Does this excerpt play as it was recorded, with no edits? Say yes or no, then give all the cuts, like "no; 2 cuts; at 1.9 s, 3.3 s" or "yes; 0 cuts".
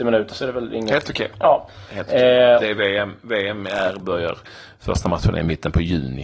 yes; 0 cuts